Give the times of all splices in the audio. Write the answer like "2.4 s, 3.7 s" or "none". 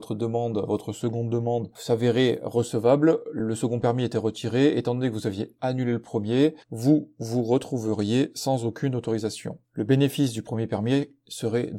none